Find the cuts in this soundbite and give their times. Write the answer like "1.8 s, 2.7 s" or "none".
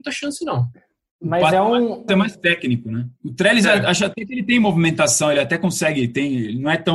2.1 s